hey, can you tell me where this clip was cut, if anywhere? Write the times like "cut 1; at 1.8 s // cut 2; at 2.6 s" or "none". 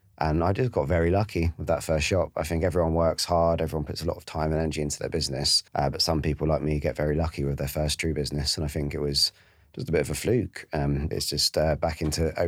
cut 1; at 5.7 s // cut 2; at 11.1 s